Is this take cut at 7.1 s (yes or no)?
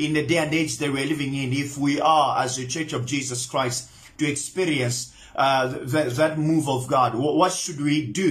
no